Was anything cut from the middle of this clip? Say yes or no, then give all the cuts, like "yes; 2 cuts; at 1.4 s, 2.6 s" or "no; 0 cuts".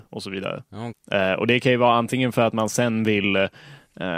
yes; 1 cut; at 0.9 s